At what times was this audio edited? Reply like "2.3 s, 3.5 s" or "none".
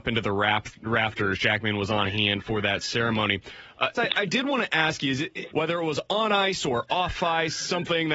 3.9 s, 5.5 s